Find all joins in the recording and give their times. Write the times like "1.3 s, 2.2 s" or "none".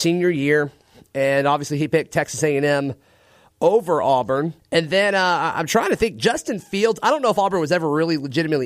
4.6 s